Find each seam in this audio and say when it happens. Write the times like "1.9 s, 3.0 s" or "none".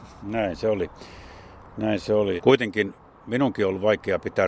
2.4 s